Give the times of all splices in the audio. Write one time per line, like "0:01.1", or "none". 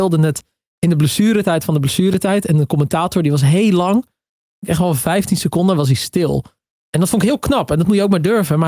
none